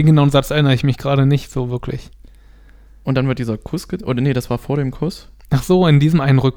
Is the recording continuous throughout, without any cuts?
yes; 0 cuts

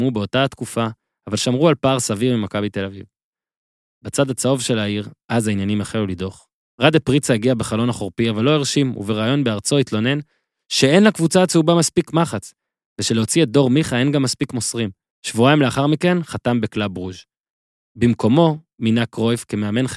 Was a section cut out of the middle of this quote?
yes; 1 cut; at 15.1 s

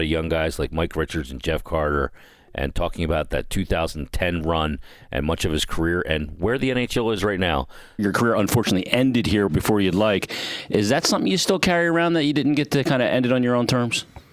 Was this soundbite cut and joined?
yes; 1 cut; at 8.0 s

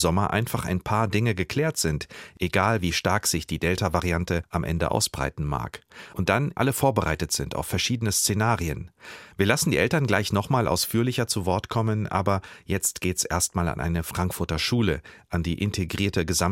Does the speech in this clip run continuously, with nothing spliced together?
no; 1 cut; at 6.6 s

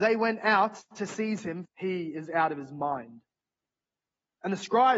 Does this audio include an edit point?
yes; 1 cut; at 1.7 s

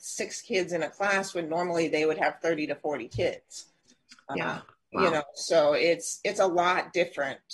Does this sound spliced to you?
no; 0 cuts

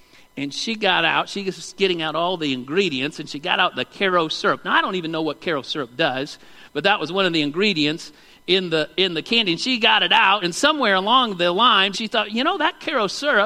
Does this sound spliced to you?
yes; 2 cuts; at 10.4 s, 11.9 s

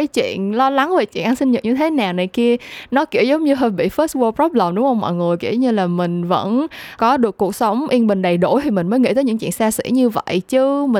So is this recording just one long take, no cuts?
no; 1 cut; at 7.0 s

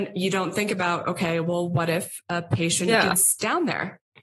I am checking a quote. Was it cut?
no; 0 cuts

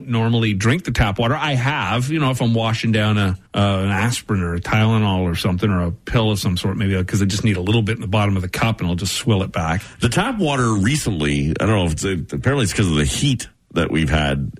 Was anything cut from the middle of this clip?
yes; 1 cut; at 3.5 s

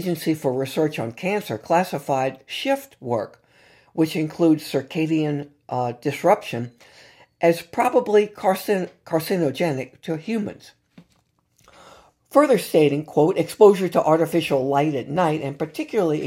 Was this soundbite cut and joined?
no; 0 cuts

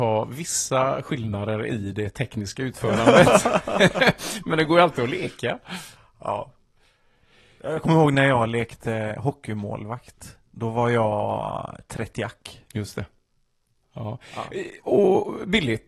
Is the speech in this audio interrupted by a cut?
no; 0 cuts

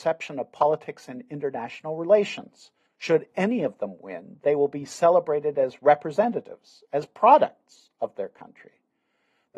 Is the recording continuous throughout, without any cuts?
no; 1 cut; at 2.9 s

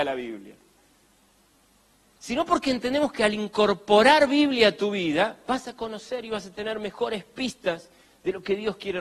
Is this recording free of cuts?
yes; 0 cuts

